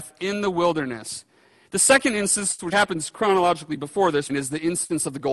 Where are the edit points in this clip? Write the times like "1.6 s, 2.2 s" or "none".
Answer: 1.6 s, 2.7 s, 4.3 s